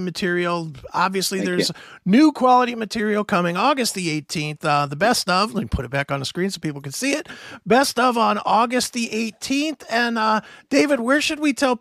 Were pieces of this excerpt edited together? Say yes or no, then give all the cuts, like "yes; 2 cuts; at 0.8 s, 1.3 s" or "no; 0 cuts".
no; 0 cuts